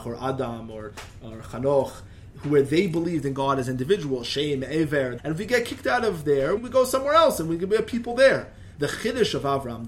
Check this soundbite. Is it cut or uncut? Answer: cut